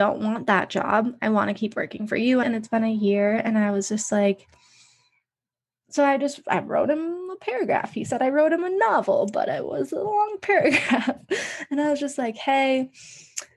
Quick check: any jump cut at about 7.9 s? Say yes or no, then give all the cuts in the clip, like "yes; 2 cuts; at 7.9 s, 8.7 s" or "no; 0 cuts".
no; 1 cut; at 2.4 s